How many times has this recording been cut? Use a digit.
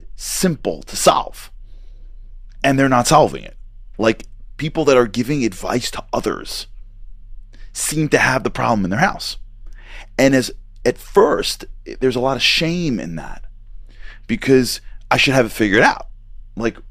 0